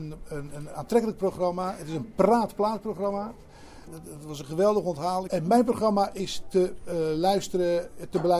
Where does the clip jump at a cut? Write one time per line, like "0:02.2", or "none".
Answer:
0:03.9
0:05.3